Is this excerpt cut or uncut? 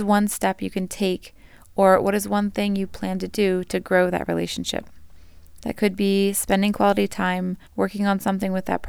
cut